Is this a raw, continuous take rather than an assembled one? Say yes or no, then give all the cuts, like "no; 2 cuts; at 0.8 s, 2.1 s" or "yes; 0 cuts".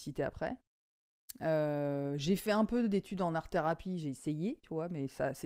yes; 0 cuts